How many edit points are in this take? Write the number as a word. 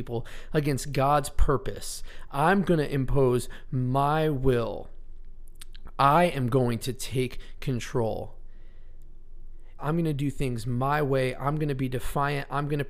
one